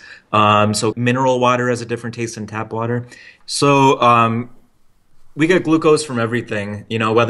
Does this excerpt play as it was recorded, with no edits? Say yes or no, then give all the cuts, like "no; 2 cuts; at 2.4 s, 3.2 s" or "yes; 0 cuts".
no; 2 cuts; at 0.9 s, 3.4 s